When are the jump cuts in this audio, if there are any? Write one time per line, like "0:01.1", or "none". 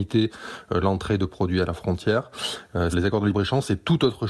0:02.9